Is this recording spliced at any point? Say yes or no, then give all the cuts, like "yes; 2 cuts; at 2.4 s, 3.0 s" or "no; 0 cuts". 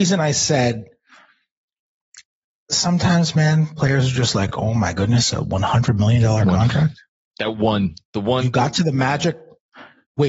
no; 0 cuts